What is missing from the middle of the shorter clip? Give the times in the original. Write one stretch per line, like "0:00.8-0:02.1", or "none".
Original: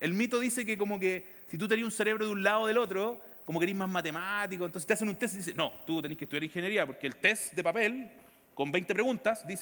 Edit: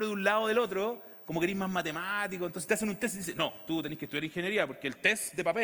none